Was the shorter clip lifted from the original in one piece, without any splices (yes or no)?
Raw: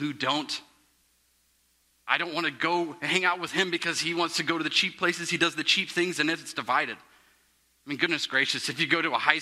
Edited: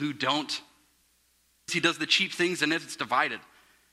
no